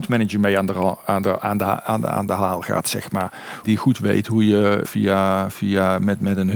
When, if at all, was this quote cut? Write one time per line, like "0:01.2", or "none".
0:03.6
0:04.8